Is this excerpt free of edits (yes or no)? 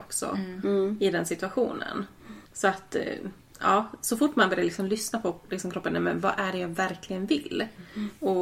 no